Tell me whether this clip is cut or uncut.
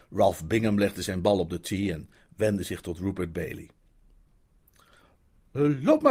uncut